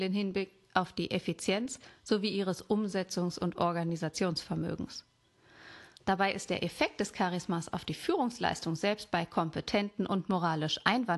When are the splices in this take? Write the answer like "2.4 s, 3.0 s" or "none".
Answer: 5.9 s